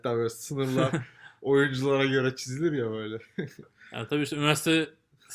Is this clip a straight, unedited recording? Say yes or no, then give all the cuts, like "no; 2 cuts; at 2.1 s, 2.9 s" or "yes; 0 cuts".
no; 1 cut; at 3.6 s